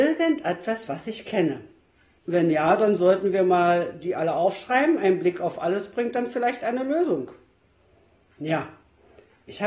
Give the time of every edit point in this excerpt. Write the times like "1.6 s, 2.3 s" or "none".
2.2 s